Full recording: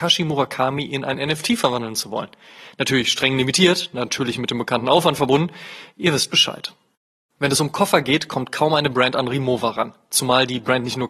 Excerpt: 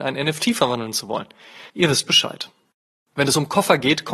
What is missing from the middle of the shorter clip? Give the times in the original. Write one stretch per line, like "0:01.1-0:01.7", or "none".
0:02.7-0:05.9